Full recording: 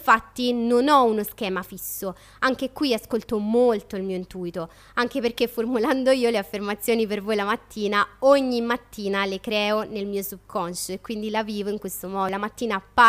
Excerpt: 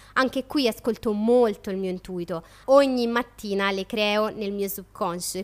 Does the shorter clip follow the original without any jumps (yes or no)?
no